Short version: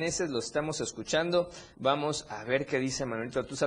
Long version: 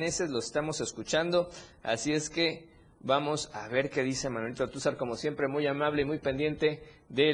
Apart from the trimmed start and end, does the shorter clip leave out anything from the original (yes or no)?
yes